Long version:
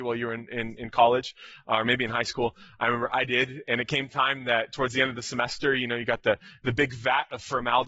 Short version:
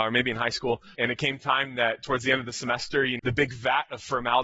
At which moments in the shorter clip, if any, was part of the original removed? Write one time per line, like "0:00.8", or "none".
0:00.9
0:03.2